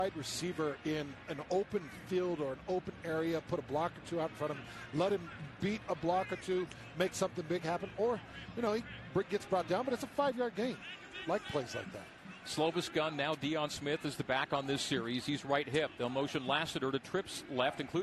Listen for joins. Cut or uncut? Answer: uncut